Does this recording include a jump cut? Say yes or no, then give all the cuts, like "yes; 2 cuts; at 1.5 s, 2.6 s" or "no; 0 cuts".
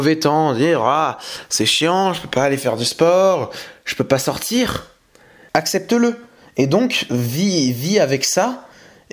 yes; 1 cut; at 5.5 s